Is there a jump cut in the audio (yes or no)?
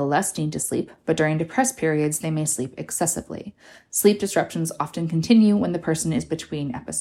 no